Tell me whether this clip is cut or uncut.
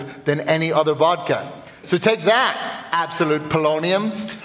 uncut